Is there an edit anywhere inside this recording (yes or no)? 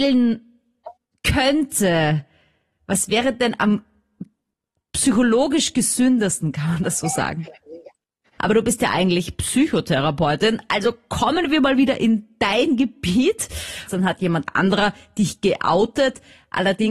yes